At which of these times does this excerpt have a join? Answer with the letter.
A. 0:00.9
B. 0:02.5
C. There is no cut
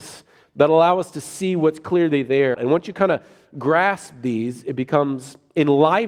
B